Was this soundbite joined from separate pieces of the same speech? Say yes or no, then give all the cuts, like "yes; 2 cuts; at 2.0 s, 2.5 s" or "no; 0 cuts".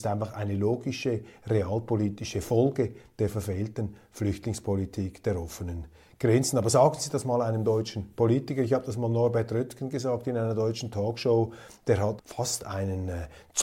yes; 1 cut; at 12.2 s